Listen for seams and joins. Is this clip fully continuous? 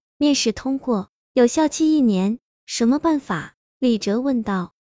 no; 1 cut; at 2.5 s

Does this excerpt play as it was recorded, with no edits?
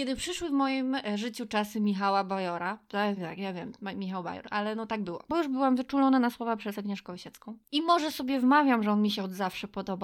no; 3 cuts; at 3.2 s, 5.3 s, 7.7 s

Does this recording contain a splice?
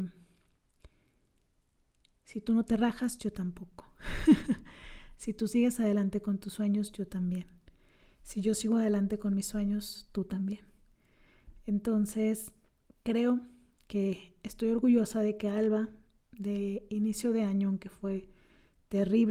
no; 0 cuts

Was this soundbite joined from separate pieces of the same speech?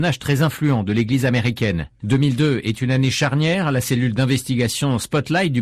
no; 0 cuts

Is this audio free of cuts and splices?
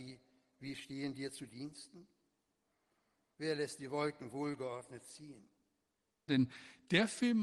no; 1 cut; at 6.3 s

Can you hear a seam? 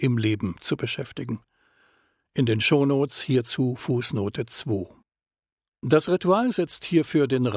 no; 0 cuts

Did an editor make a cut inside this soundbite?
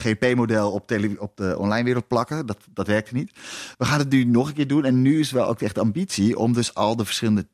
no; 0 cuts

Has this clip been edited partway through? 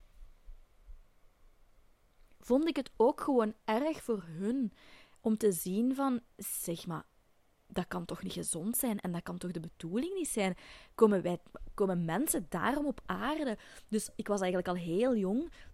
no; 0 cuts

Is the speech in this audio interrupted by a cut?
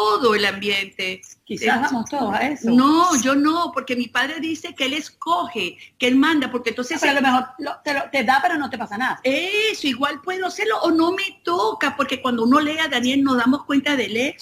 no; 0 cuts

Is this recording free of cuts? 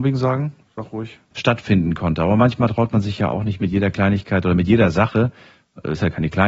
no; 1 cut; at 1.3 s

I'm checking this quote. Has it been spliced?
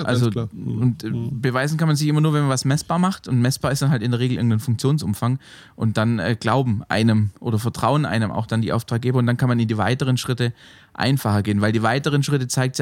no; 0 cuts

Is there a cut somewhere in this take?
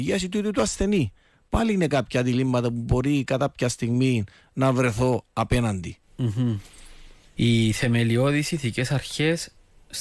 yes; 1 cut; at 7.4 s

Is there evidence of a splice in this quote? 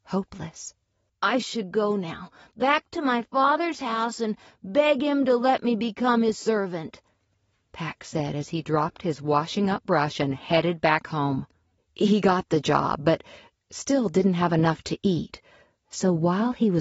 yes; 2 cuts; at 1.1 s, 11.8 s

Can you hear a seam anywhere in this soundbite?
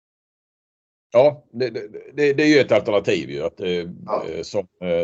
no; 0 cuts

